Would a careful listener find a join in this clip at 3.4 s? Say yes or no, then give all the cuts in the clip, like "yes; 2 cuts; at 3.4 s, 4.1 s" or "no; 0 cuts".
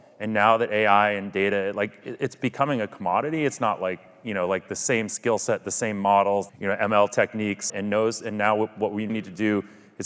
no; 3 cuts; at 6.5 s, 7.7 s, 9.1 s